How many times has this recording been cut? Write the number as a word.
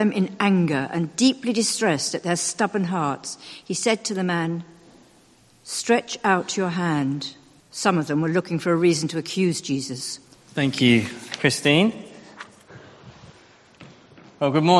two